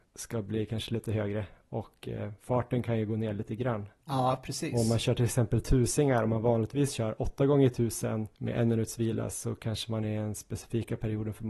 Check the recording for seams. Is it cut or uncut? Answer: uncut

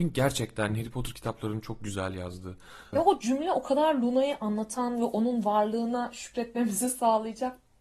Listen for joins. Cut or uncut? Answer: cut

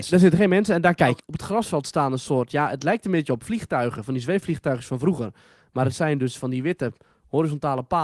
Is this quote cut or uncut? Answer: cut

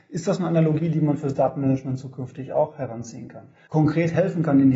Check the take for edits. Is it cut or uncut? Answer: cut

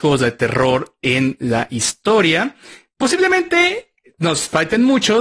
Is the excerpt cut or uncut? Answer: uncut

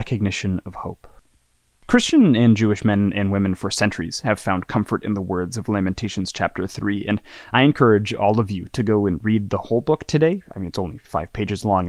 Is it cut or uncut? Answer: uncut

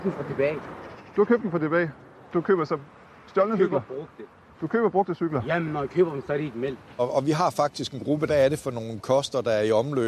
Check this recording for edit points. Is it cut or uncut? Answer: cut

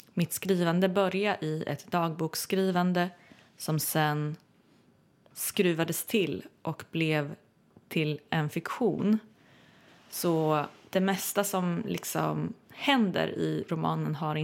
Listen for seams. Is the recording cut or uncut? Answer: cut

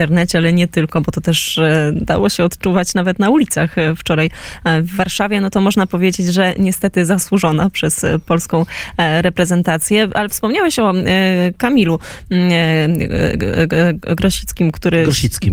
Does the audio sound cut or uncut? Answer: uncut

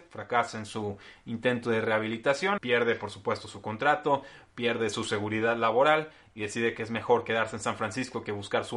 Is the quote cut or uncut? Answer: cut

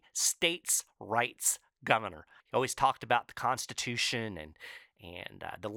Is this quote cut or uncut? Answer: cut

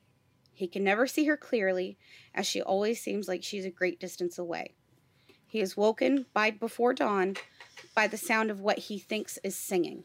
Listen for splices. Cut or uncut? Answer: uncut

